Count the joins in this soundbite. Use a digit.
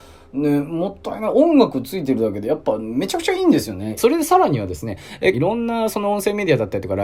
2